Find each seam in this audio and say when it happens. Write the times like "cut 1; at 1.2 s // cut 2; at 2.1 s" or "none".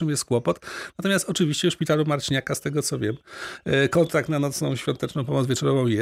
none